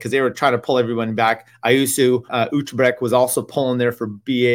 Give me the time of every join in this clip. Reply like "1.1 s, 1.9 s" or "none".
2.3 s